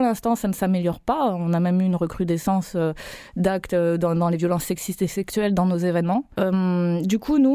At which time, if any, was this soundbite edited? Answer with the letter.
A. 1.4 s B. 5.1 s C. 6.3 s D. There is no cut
C